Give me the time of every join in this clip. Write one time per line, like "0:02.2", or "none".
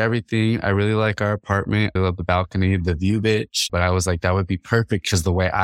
0:02.0
0:03.7